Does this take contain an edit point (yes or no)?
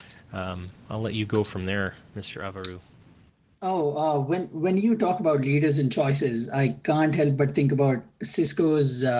no